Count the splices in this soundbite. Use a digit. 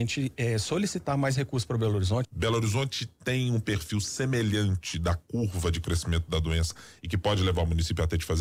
1